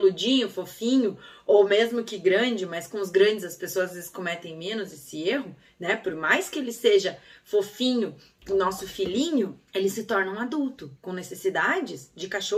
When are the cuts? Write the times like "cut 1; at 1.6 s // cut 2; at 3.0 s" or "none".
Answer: cut 1; at 9.7 s // cut 2; at 11.0 s